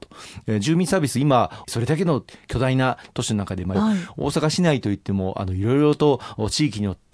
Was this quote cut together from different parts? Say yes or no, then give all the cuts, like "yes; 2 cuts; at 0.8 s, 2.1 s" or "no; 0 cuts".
yes; 2 cuts; at 1.6 s, 3.7 s